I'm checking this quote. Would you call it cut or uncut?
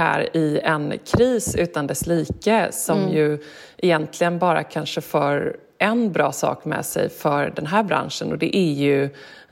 uncut